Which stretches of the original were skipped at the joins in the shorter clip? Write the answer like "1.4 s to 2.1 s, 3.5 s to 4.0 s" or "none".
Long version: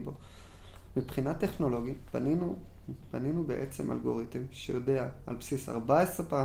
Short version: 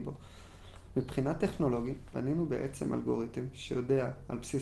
2.1 s to 3.1 s